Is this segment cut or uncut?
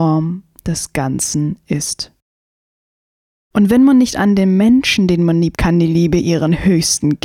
cut